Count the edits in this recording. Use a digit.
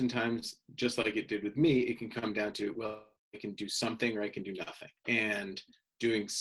2